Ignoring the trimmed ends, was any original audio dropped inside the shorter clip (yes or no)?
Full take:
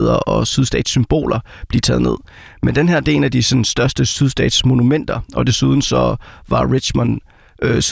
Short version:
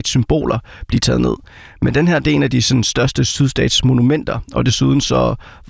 no